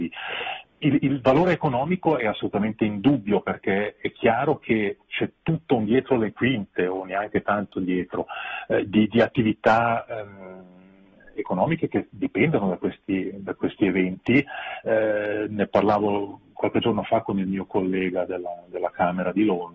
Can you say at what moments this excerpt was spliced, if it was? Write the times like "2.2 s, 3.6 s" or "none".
none

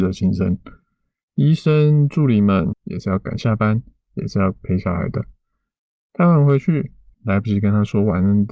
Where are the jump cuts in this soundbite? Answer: 2.7 s, 7.1 s

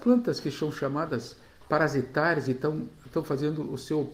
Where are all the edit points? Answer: none

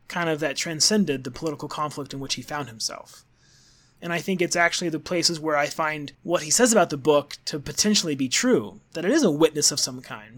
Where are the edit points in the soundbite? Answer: 4.0 s, 6.1 s

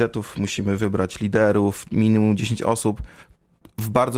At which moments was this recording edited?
none

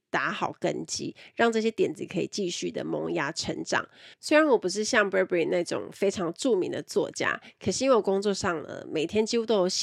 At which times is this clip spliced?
4.1 s

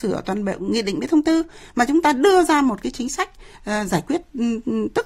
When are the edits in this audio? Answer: none

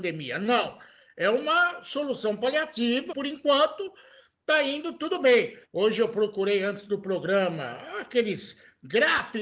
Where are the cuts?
3.1 s, 5.6 s

